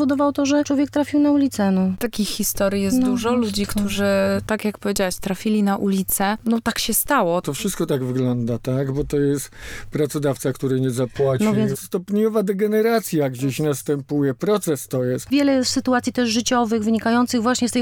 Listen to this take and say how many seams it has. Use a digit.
2